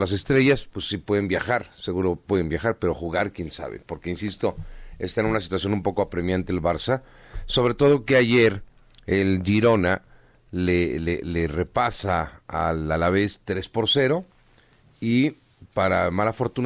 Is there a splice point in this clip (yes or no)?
no